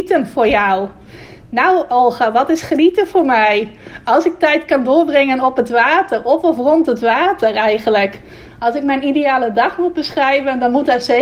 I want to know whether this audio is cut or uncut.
uncut